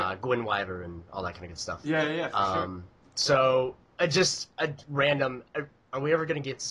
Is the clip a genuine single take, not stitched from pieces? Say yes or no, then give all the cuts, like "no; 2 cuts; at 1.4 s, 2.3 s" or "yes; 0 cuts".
yes; 0 cuts